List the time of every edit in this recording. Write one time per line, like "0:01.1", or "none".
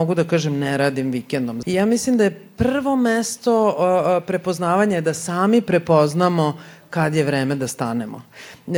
0:01.6